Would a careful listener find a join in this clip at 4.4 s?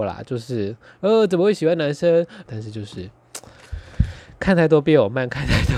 no; 1 cut; at 2.5 s

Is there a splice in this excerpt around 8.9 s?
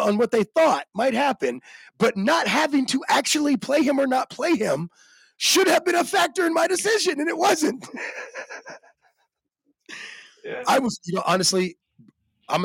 no; 0 cuts

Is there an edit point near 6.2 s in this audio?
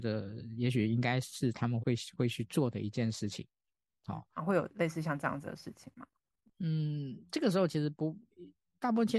no; 2 cuts; at 1.8 s, 4.4 s

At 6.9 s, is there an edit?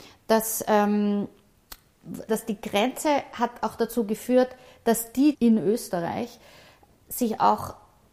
no; 2 cuts; at 2.3 s, 5.3 s

